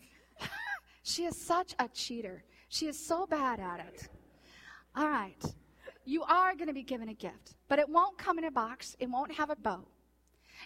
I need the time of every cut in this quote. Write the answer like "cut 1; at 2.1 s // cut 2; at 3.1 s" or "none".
cut 1; at 9.6 s